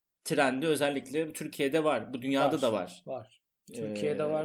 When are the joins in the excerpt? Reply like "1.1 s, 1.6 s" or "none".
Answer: none